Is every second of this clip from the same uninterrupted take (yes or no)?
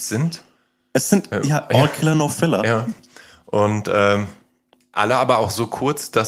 yes